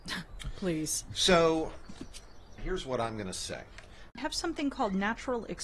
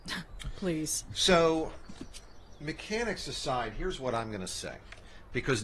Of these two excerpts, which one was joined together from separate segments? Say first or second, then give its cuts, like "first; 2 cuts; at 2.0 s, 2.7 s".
first; 2 cuts; at 2.6 s, 4.1 s